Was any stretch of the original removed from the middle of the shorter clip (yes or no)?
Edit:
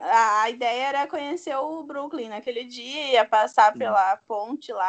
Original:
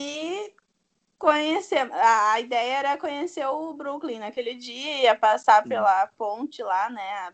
no